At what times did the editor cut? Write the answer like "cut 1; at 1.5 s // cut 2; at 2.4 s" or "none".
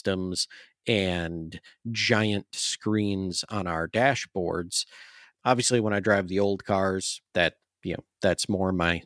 cut 1; at 5.3 s // cut 2; at 7.3 s